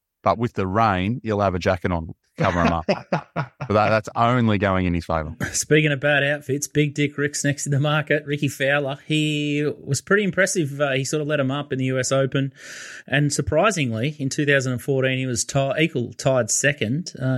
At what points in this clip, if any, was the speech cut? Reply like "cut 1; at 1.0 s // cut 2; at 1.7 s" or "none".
none